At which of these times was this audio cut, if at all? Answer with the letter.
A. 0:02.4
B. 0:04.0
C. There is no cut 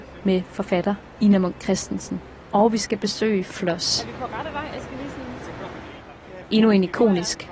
A